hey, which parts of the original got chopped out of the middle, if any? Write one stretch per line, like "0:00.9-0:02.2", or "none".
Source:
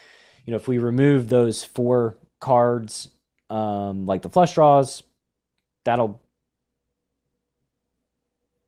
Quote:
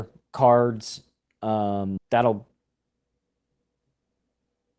0:04.0-0:05.7